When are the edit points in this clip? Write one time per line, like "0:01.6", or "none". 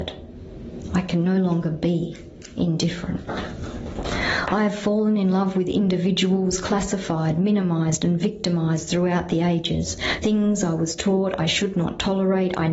none